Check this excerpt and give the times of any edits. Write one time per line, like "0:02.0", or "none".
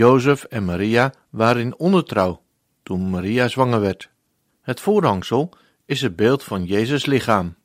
0:04.5